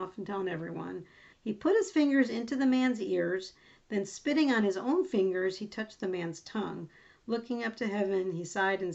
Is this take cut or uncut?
cut